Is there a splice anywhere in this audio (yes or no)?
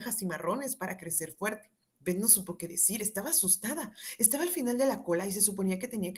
yes